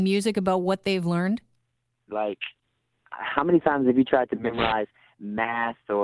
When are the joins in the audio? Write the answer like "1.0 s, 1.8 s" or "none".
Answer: 2.1 s